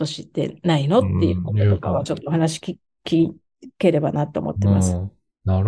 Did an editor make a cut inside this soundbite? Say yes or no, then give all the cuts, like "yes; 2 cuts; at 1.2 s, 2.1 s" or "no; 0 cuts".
no; 0 cuts